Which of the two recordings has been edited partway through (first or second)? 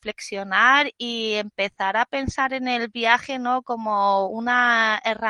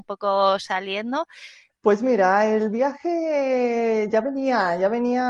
second